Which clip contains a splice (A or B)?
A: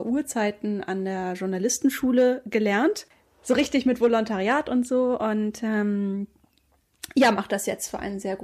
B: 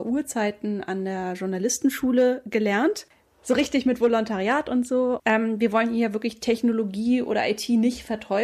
B